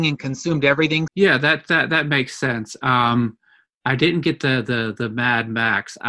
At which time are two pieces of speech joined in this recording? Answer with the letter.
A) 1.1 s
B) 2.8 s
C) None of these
A